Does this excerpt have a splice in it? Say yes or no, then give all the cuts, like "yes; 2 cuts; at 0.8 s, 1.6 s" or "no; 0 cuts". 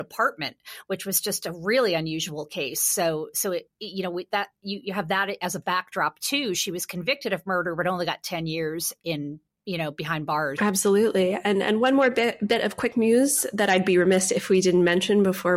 yes; 1 cut; at 10.6 s